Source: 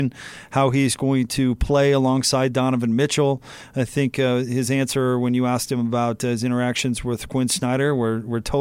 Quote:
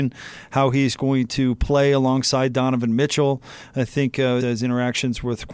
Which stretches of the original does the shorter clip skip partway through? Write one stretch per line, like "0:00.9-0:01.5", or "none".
0:04.4-0:06.2